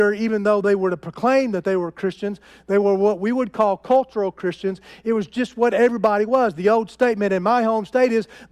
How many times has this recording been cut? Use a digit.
0